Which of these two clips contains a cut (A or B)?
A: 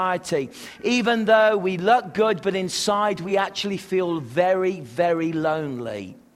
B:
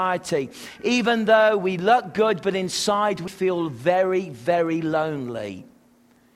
B